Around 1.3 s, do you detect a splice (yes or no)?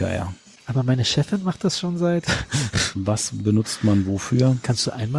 no